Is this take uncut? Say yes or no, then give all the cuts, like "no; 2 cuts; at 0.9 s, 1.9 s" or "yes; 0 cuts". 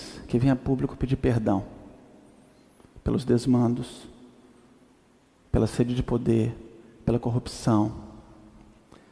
yes; 0 cuts